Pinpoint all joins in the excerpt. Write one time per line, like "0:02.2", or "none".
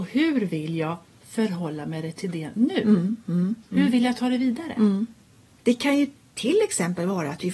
0:05.6